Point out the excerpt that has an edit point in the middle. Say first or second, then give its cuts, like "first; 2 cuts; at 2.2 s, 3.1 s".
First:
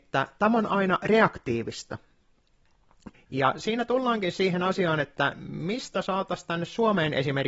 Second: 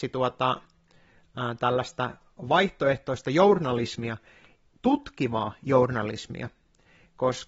first; 1 cut; at 3.1 s